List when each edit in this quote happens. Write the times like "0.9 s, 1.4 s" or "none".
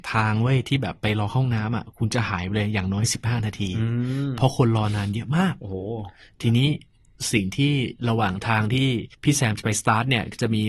9.1 s